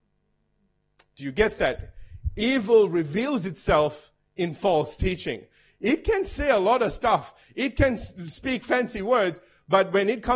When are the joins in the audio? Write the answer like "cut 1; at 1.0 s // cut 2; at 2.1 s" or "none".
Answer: none